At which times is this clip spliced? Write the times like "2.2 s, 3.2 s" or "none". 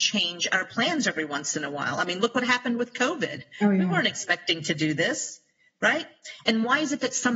none